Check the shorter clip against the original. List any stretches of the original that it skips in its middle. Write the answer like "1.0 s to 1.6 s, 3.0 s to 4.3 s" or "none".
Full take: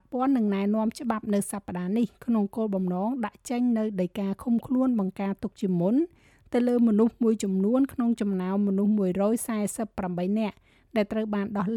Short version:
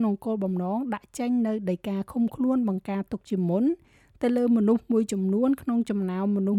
none